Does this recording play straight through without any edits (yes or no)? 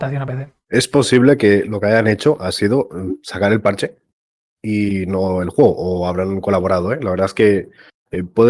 yes